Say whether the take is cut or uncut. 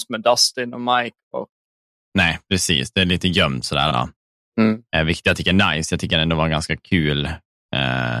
cut